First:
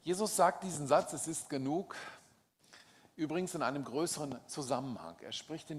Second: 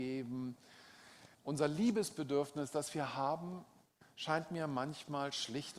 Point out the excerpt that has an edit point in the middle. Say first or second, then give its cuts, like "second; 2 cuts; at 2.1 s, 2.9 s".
second; 1 cut; at 1.3 s